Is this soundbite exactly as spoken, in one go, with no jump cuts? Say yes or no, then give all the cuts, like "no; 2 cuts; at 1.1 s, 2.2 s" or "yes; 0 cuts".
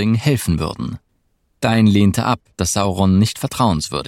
no; 1 cut; at 2.5 s